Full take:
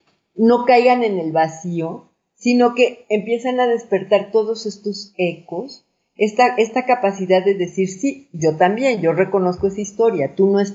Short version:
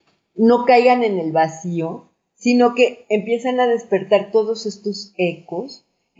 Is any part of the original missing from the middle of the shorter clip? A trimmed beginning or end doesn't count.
no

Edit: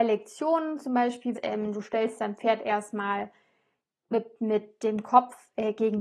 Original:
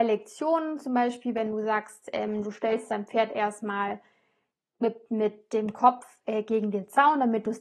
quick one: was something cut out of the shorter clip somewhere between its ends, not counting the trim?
yes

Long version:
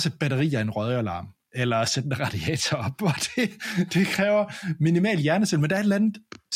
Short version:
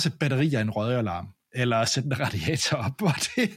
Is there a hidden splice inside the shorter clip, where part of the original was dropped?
no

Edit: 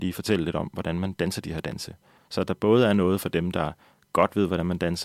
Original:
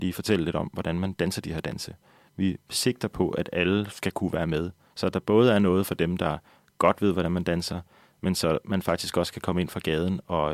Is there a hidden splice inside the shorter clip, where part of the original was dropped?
yes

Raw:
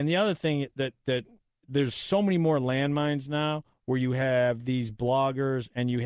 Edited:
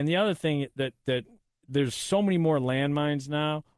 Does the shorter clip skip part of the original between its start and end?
no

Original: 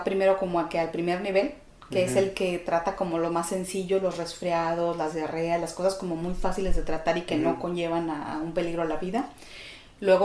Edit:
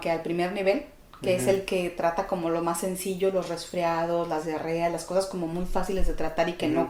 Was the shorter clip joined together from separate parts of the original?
no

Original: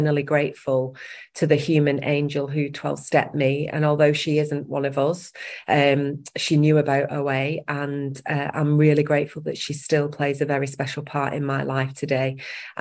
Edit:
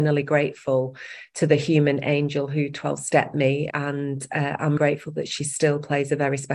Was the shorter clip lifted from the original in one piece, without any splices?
no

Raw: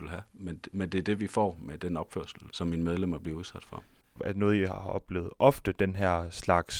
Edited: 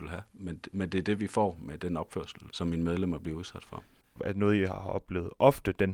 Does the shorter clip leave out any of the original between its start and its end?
no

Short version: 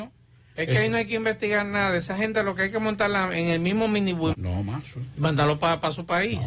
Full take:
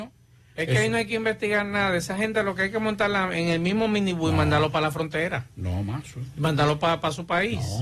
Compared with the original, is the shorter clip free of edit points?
no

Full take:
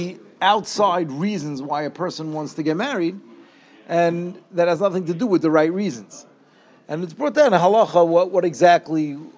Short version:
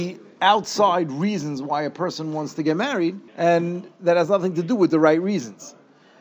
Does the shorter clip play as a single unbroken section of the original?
no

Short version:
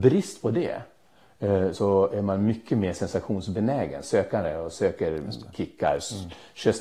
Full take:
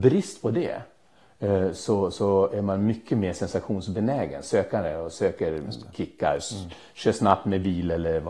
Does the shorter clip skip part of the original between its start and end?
yes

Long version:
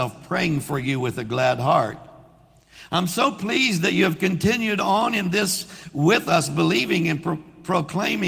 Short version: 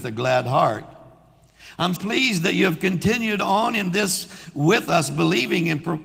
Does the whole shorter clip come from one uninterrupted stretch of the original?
no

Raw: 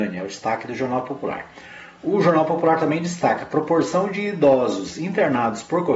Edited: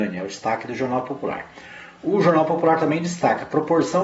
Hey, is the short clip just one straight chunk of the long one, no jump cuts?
yes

